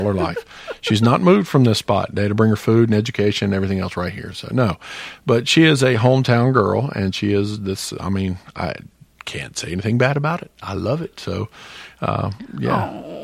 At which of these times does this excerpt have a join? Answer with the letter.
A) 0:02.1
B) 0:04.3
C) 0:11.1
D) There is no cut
D